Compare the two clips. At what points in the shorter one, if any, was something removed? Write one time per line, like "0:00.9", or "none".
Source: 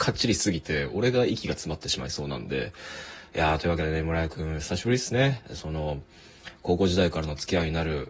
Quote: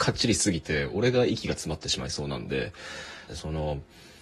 0:03.3